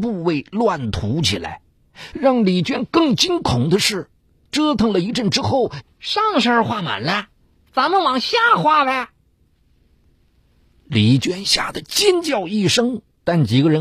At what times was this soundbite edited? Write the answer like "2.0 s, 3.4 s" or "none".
2.1 s, 5.8 s